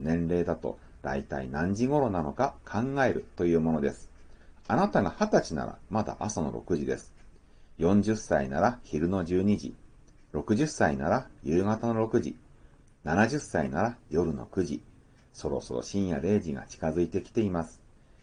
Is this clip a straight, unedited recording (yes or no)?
yes